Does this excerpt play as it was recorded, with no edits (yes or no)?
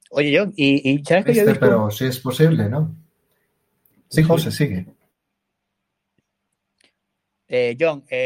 yes